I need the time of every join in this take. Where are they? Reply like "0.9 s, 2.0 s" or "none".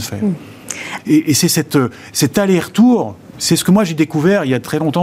1.0 s, 3.3 s